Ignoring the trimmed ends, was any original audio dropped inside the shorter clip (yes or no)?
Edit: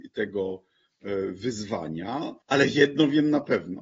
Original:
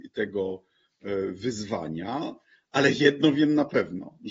yes